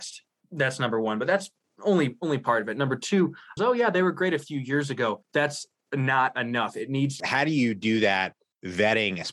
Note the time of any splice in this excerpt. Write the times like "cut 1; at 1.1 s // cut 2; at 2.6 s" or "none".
cut 1; at 3.6 s // cut 2; at 7.2 s